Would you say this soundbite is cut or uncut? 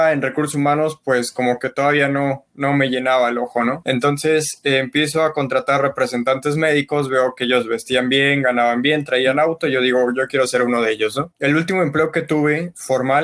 cut